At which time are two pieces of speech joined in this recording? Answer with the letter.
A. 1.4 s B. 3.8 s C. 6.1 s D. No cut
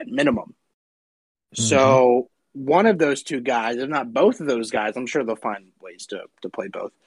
D